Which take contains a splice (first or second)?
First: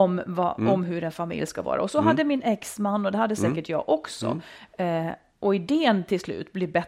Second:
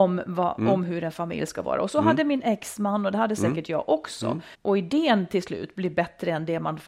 second